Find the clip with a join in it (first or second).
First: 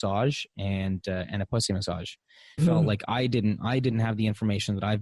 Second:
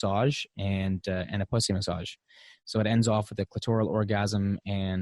first